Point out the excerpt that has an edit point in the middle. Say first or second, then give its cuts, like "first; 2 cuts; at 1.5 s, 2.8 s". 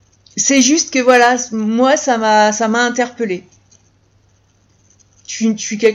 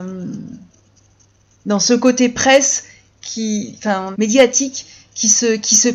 second; 1 cut; at 4.1 s